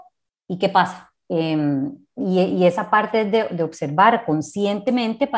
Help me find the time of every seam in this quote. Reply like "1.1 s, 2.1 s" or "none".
1.2 s